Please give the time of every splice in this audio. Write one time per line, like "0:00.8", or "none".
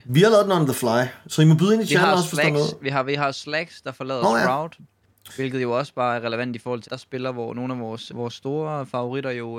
0:06.8
0:08.1